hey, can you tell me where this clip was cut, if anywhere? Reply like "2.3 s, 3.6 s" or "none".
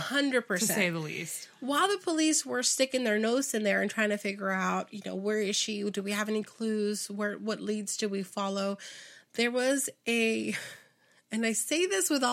none